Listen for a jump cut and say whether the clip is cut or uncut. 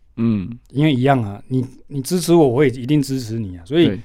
uncut